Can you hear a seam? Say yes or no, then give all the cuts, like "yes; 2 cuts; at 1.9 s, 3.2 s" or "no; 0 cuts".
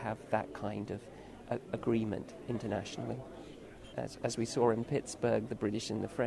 yes; 1 cut; at 3.9 s